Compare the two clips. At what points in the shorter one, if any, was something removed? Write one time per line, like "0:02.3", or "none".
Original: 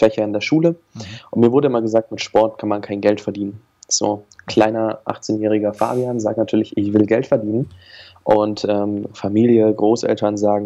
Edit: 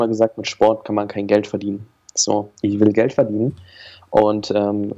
0:02.6